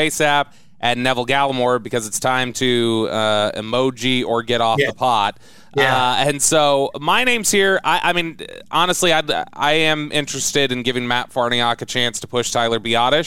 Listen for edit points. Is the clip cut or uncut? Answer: uncut